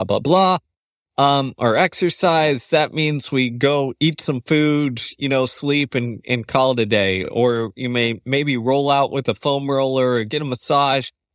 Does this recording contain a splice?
no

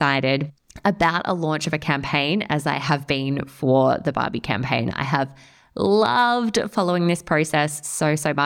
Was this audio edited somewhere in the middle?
no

